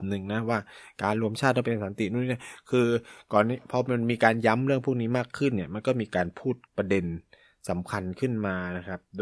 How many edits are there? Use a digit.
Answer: 1